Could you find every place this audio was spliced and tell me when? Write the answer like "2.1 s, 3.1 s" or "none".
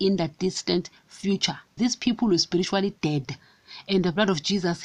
1.8 s